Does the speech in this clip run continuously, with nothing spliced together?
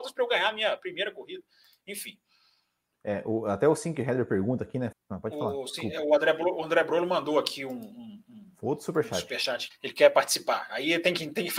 no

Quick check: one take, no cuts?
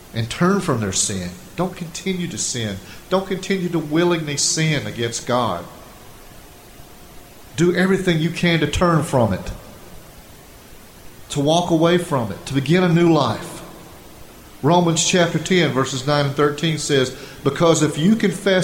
yes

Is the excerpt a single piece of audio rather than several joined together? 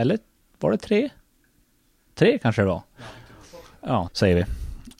no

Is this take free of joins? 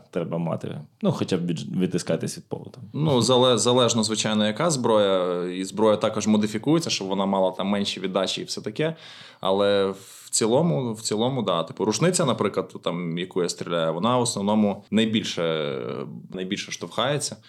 no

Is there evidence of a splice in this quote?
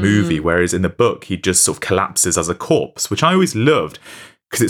no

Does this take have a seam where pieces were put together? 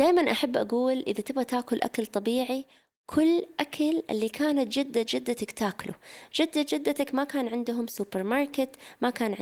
no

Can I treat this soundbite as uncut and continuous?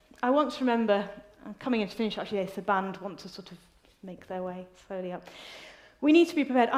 yes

